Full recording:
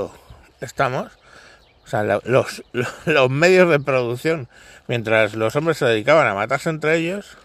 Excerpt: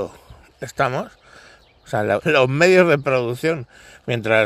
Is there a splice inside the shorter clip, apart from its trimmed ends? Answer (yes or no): yes